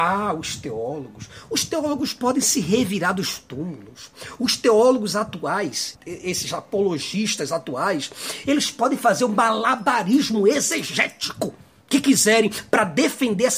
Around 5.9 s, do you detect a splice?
yes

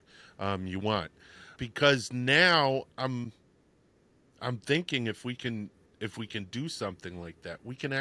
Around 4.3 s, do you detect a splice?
no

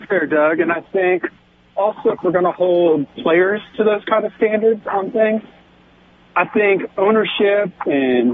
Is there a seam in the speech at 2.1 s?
yes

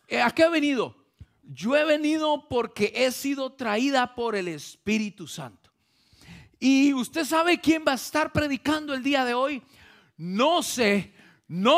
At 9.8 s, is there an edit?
no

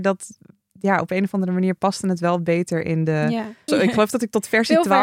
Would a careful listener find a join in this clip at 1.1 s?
no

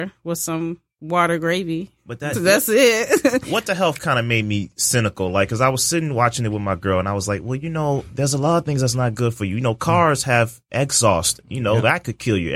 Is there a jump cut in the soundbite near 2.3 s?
yes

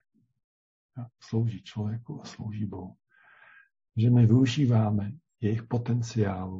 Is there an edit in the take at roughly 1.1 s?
no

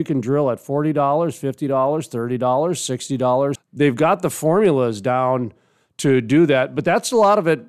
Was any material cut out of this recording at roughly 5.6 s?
no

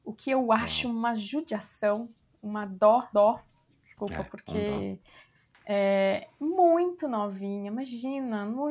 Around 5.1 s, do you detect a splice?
no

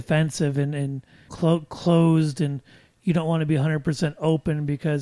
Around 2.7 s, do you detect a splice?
no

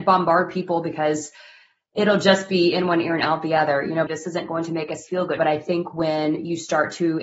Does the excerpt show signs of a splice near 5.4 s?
yes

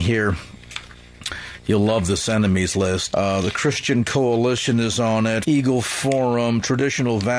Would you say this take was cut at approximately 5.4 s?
yes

